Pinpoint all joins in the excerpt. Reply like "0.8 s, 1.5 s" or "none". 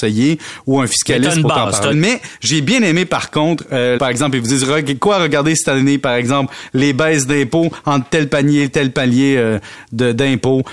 1.9 s, 4.0 s